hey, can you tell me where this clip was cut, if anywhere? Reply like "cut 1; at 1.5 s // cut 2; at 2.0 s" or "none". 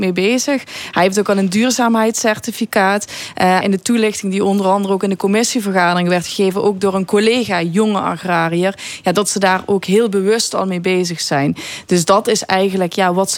cut 1; at 3.6 s